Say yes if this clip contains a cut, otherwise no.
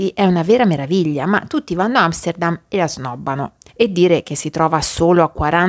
no